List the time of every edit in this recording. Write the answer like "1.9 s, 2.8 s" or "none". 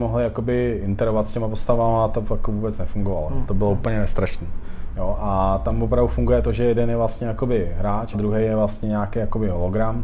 4.9 s, 8.1 s